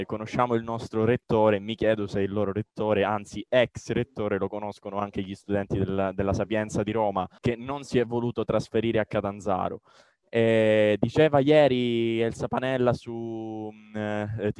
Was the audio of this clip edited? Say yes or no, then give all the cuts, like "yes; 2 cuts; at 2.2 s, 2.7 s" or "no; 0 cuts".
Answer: yes; 1 cut; at 7.4 s